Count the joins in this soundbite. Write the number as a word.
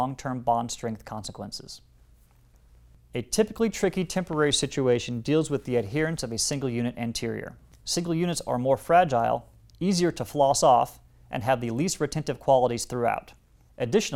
zero